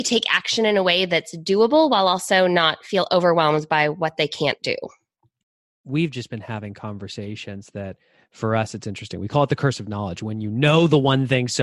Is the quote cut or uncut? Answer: uncut